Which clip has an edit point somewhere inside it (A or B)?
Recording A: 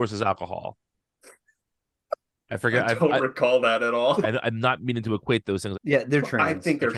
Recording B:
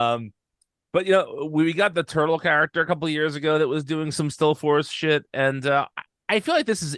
A